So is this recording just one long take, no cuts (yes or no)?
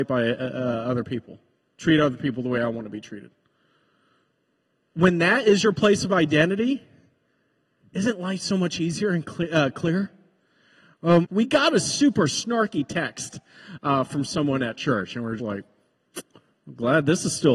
no